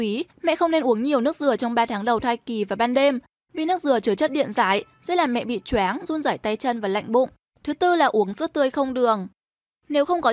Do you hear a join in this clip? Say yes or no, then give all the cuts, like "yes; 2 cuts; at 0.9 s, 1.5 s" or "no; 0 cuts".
yes; 1 cut; at 7.5 s